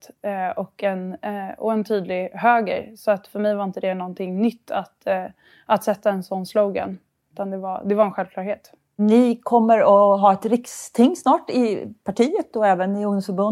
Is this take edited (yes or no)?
no